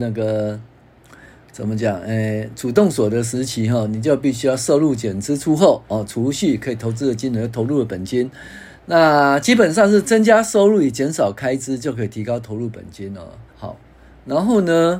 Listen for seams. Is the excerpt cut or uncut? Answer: cut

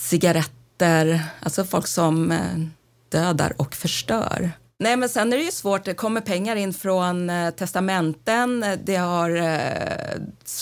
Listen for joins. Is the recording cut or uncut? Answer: uncut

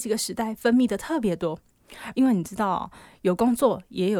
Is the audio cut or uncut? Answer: cut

